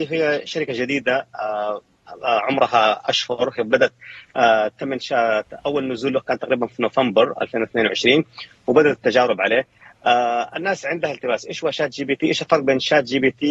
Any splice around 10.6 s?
no; 0 cuts

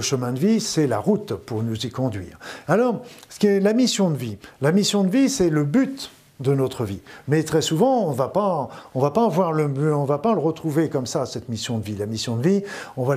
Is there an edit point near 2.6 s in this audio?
yes; 1 cut; at 2.6 s

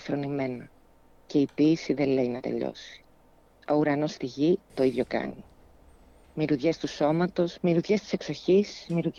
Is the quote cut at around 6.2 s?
no; 2 cuts; at 4.7 s, 7.6 s

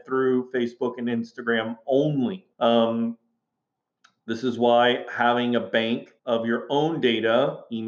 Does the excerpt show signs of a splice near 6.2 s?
yes; 2 cuts; at 2.5 s, 6.2 s

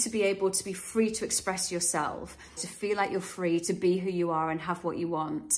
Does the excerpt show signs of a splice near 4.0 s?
no; 1 cut; at 2.6 s

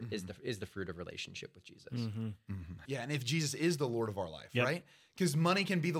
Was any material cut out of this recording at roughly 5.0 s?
no; 1 cut; at 2.8 s

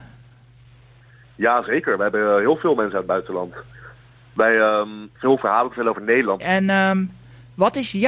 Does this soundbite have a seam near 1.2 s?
no; 2 cuts; at 5.2 s, 6.4 s

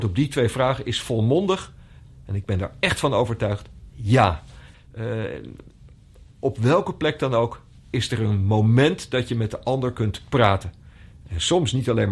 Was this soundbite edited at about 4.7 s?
yes; 1 cut; at 4.7 s

